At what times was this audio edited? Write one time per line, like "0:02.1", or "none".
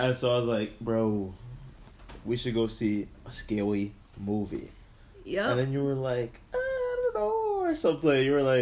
none